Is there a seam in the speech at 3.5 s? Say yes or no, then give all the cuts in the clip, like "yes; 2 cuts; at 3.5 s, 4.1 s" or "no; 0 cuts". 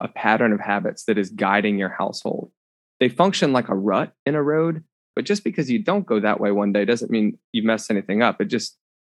no; 1 cut; at 5.1 s